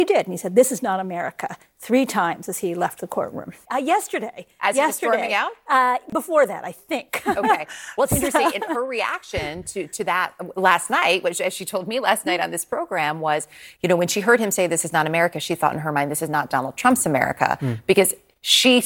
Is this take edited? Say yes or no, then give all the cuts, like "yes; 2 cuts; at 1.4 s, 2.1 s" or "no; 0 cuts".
yes; 1 cut; at 3.6 s